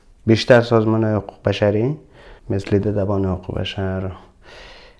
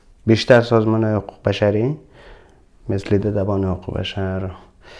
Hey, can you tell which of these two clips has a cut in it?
first; 1 cut; at 2.4 s

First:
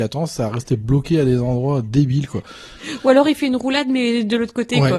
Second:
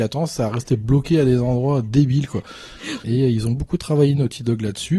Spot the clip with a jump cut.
second; 1 cut; at 3.0 s

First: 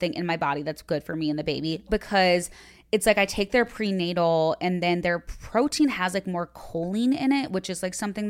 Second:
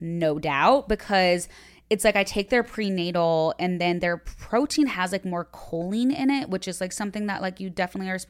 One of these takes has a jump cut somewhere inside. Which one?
first; 1 cut; at 1.9 s

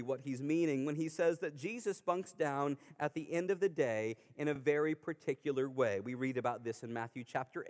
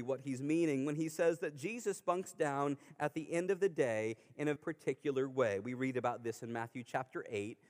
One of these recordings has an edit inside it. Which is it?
second; 1 cut; at 4.6 s

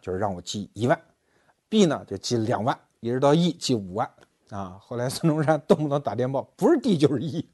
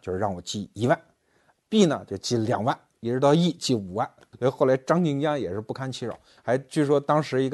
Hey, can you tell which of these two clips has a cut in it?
second; 2 cuts; at 4.3 s, 6.4 s

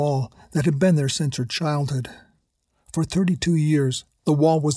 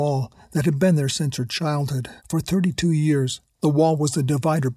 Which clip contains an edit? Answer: second; 1 cut; at 2.2 s

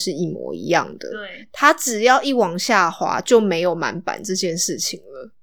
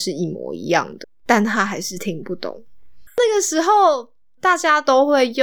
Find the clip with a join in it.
second; 2 cuts; at 1.0 s, 3.1 s

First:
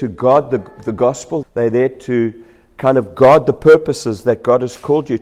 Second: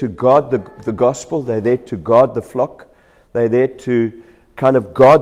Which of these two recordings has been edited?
first; 1 cut; at 1.4 s

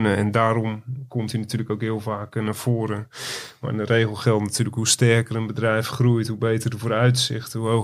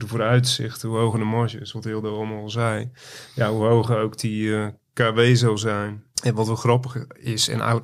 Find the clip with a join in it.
second; 1 cut; at 6.1 s

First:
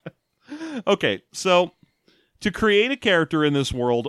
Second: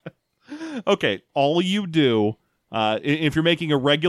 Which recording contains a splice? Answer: second; 1 cut; at 1.3 s

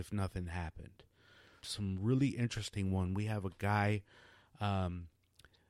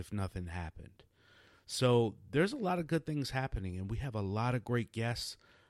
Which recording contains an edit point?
first; 1 cut; at 1.6 s

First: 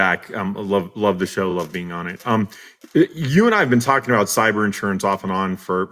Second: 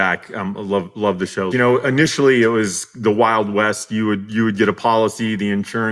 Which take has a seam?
second; 1 cut; at 1.5 s

